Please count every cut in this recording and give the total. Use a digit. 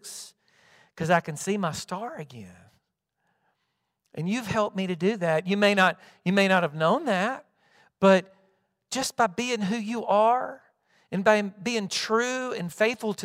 0